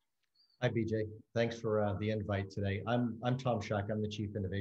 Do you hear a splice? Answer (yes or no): no